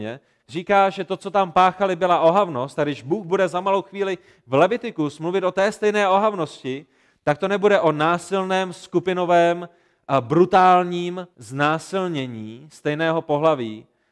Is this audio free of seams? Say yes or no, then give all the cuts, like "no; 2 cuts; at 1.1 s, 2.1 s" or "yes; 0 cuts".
no; 1 cut; at 11.3 s